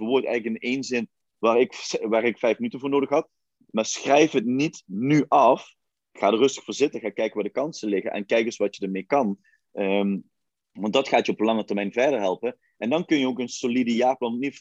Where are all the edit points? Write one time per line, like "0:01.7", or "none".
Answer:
none